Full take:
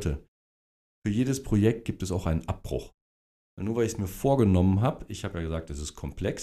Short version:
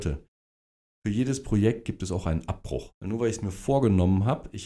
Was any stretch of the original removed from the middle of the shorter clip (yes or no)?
yes